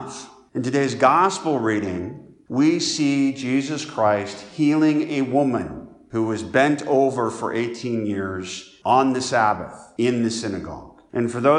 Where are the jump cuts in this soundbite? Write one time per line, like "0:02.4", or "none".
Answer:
none